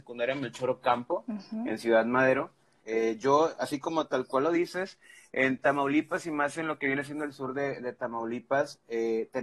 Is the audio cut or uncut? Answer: cut